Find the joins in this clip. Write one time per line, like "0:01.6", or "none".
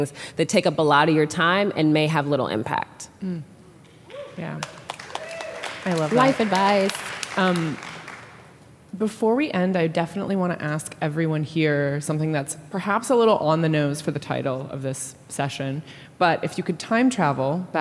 none